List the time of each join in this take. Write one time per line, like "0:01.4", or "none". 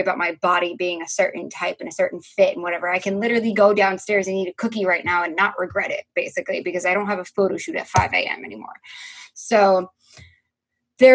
none